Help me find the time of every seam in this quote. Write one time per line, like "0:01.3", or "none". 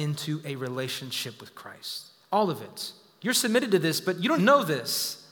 0:03.2
0:04.4